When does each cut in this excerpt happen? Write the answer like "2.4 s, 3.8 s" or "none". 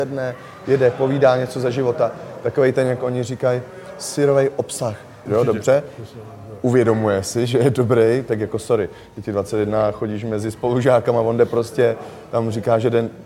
5.3 s